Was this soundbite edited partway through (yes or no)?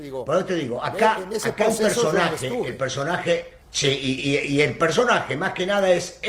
yes